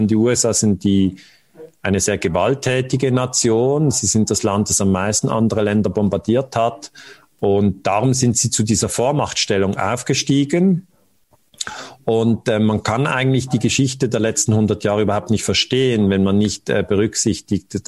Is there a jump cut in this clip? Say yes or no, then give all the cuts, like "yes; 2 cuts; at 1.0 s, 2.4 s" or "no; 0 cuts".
no; 0 cuts